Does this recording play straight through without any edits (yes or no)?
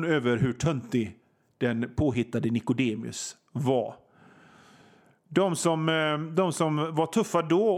yes